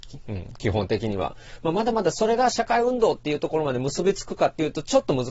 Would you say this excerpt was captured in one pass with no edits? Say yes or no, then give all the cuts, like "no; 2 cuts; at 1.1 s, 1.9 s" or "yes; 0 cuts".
yes; 0 cuts